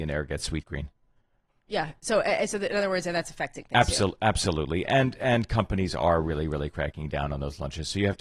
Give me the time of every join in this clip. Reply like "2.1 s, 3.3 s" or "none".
none